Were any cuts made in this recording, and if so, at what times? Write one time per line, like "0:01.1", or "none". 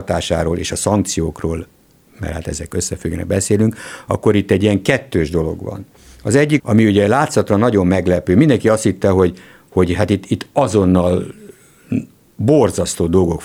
0:06.6